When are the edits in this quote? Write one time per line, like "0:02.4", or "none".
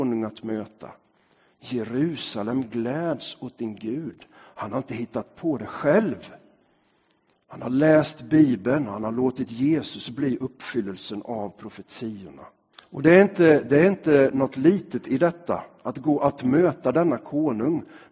0:12.7

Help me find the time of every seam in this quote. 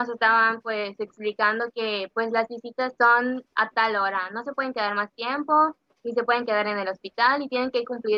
0:03.0

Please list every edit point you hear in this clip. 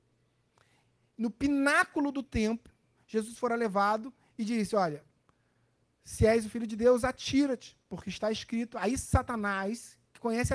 none

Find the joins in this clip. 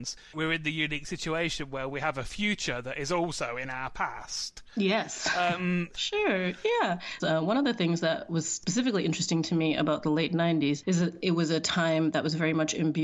0:05.9
0:07.2

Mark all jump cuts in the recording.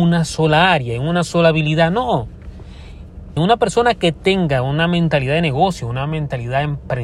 0:03.4

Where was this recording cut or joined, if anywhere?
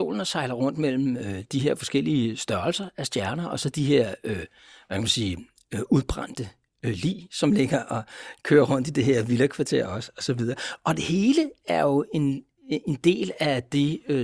none

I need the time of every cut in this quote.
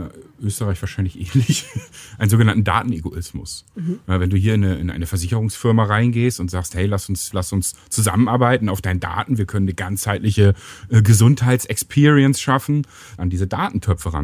0:07.3
0:13.2

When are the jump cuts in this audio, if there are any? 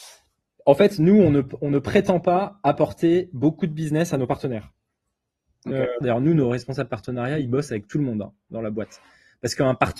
0:06.0

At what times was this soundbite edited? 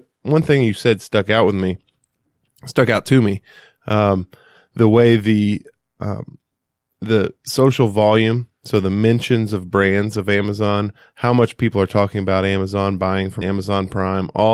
0:13.4

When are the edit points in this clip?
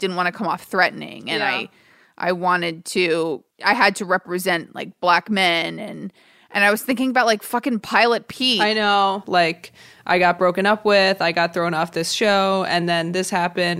0:09.2

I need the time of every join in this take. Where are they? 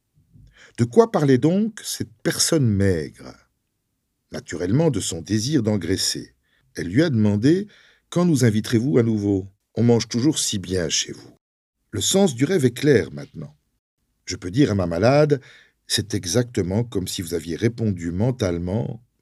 none

